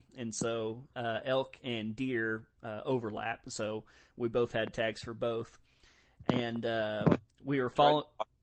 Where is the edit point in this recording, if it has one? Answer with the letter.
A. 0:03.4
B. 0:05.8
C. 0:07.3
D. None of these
D